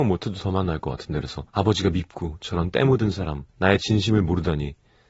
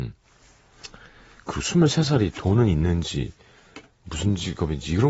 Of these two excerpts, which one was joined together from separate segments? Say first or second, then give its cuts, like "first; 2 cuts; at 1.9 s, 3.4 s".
first; 2 cuts; at 1.5 s, 3.5 s